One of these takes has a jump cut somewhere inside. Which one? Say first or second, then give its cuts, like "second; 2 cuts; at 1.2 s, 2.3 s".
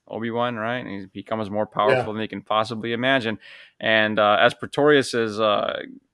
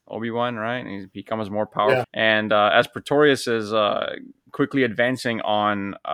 second; 1 cut; at 2.0 s